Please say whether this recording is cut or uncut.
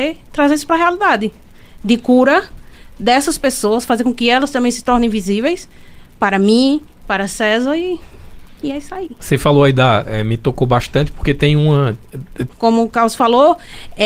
cut